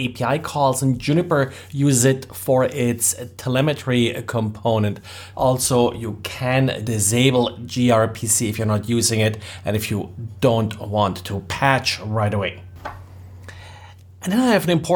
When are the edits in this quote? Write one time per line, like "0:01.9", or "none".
0:05.3
0:06.8